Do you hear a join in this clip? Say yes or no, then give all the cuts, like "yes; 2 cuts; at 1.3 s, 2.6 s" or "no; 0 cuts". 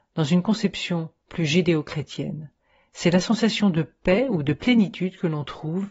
no; 0 cuts